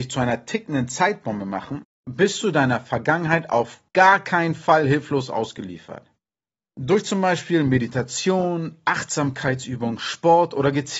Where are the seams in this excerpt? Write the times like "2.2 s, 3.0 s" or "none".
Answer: none